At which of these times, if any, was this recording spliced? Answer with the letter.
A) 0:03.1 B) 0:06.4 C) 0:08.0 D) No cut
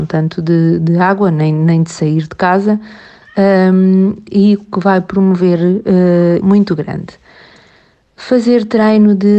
B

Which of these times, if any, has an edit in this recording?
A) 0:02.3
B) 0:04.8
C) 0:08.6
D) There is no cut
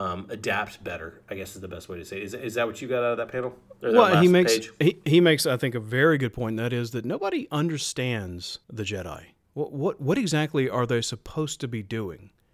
C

